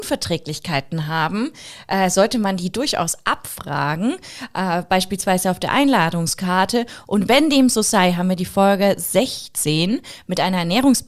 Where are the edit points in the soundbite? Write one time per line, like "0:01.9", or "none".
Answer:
none

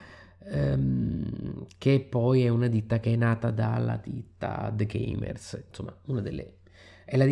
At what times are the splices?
none

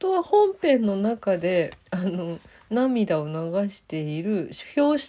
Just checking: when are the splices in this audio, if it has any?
0:01.8

